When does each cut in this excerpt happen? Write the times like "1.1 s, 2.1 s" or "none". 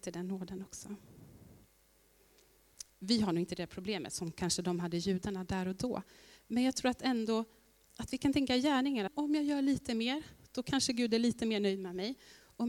2.9 s, 9.1 s